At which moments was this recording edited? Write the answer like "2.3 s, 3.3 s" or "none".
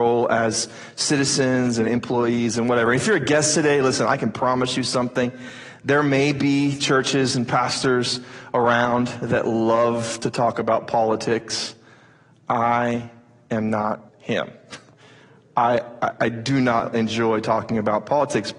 14.1 s, 16.2 s